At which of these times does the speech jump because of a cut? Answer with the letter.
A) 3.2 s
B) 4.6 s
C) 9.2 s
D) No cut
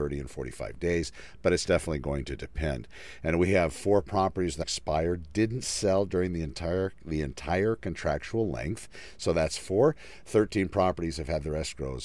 B